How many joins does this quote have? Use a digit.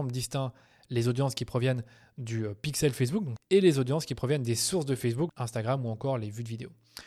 2